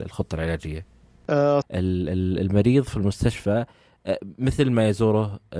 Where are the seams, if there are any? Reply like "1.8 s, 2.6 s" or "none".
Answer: 1.6 s